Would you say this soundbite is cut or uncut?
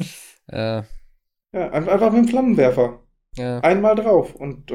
uncut